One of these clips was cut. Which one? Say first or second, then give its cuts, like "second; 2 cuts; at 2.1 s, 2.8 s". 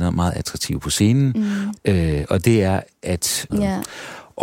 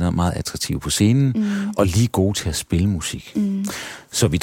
first; 2 cuts; at 1.8 s, 3.5 s